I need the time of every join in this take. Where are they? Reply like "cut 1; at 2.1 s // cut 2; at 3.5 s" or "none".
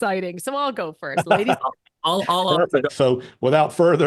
cut 1; at 2.9 s